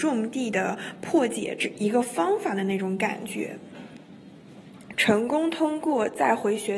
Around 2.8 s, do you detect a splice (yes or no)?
no